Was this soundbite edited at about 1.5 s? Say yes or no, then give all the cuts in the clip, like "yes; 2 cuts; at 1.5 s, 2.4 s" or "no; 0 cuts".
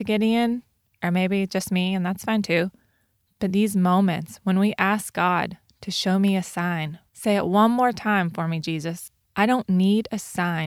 no; 2 cuts; at 7.1 s, 9.2 s